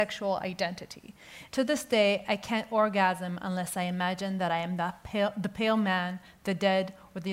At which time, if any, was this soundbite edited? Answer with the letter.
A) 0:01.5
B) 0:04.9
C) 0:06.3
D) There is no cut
A